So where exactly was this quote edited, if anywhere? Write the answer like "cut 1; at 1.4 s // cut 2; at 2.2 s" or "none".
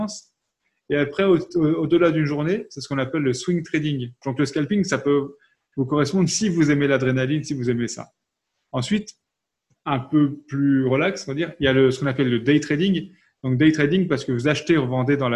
cut 1; at 4.2 s